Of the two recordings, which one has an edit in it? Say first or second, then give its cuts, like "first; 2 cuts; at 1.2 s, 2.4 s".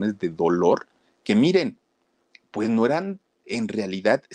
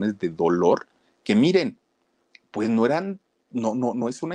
first; 1 cut; at 3.4 s